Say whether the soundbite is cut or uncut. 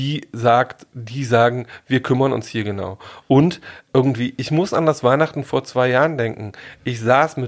uncut